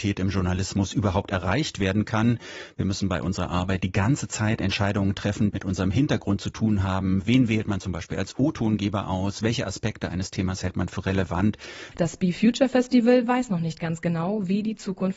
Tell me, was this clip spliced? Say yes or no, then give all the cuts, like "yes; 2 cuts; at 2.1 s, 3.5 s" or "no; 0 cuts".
yes; 2 cuts; at 5.5 s, 11.9 s